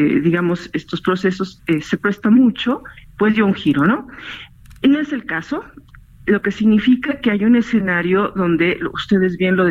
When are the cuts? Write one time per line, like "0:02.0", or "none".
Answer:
none